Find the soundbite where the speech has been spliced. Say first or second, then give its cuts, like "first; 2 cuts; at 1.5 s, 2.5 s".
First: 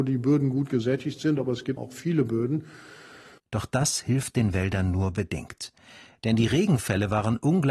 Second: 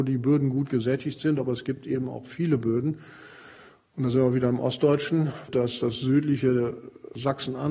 first; 2 cuts; at 1.8 s, 3.4 s